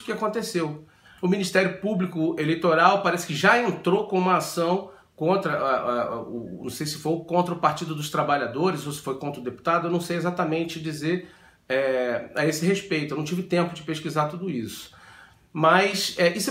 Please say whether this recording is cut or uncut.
cut